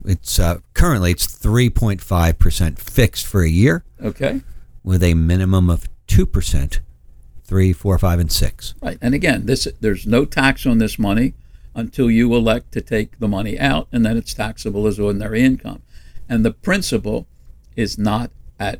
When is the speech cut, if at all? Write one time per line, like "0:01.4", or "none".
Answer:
0:07.4